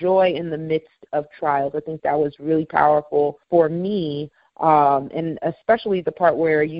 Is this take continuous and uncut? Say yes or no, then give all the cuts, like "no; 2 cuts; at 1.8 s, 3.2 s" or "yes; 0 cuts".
no; 1 cut; at 3.4 s